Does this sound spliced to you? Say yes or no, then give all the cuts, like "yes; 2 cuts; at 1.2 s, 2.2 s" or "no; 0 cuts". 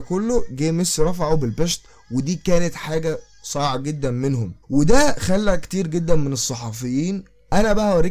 yes; 1 cut; at 4.6 s